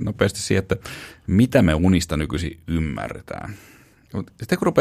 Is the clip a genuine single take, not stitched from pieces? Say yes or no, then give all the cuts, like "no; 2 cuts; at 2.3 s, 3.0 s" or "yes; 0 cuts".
yes; 0 cuts